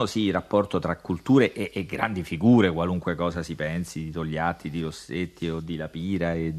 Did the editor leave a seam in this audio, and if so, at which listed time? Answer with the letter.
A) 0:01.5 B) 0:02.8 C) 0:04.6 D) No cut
D